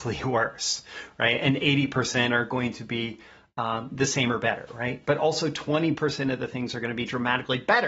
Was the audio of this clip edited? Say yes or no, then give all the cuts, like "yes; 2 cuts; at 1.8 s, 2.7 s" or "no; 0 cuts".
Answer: no; 0 cuts